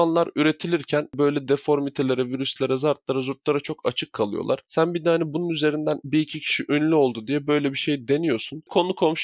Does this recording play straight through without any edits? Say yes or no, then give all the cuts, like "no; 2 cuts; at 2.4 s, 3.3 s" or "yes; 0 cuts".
yes; 0 cuts